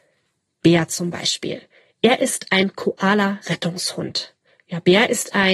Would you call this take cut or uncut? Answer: uncut